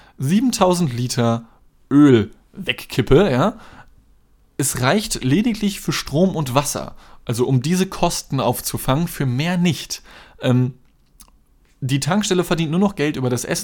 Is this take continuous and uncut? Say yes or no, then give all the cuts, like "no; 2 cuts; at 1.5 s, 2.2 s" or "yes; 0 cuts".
yes; 0 cuts